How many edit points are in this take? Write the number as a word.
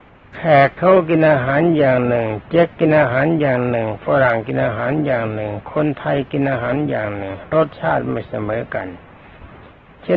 zero